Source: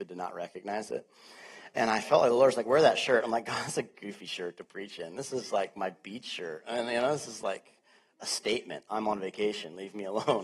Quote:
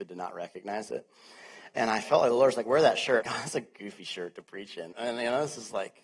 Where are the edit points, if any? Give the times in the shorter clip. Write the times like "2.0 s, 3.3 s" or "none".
3.2 s, 4.9 s